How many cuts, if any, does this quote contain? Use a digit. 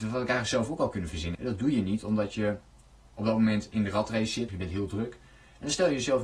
2